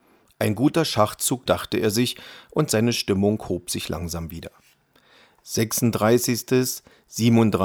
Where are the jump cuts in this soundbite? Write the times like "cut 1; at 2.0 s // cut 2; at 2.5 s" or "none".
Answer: cut 1; at 1.5 s